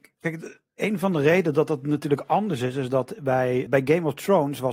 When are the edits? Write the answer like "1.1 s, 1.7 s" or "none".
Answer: 3.7 s